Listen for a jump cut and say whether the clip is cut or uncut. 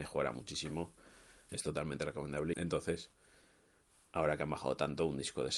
cut